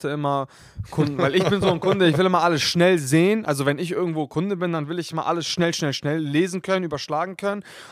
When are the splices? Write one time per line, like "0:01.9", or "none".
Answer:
none